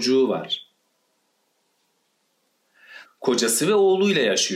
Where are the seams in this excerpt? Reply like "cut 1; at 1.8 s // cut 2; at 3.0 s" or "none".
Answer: cut 1; at 3.1 s